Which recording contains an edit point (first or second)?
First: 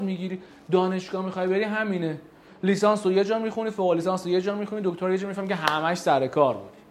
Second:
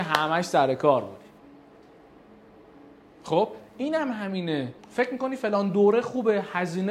second